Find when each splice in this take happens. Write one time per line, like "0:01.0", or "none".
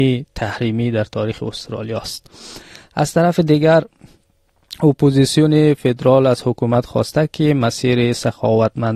none